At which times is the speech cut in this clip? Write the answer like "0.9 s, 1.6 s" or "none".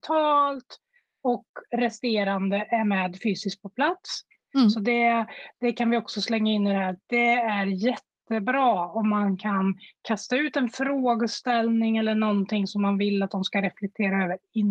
4.5 s